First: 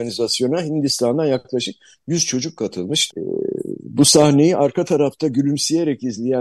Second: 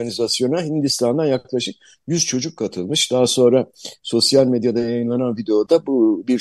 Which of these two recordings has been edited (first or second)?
first